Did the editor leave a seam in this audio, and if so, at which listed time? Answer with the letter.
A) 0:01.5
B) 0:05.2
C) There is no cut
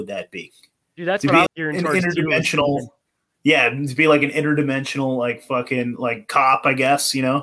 A